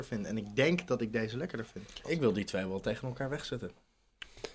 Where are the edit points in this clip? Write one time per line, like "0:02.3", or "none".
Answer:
0:02.0